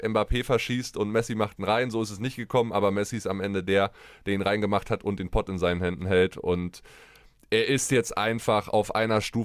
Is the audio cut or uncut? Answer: uncut